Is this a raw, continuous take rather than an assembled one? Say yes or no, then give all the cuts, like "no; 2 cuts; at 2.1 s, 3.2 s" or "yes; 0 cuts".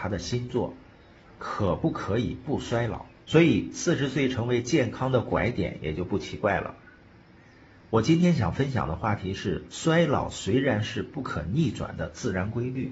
no; 1 cut; at 3.2 s